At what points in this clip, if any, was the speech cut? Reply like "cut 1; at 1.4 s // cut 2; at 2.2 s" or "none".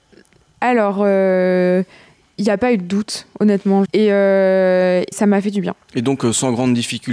cut 1; at 3.9 s // cut 2; at 5.1 s